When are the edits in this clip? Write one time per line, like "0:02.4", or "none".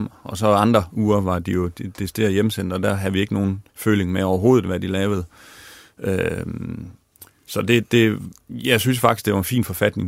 0:03.7